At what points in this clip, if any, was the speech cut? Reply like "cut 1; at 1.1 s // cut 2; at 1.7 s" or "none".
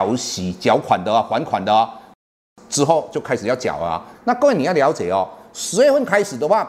cut 1; at 4.1 s